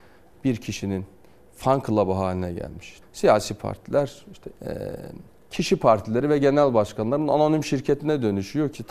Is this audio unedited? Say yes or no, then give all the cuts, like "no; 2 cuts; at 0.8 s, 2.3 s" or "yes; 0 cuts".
no; 2 cuts; at 3.0 s, 4.5 s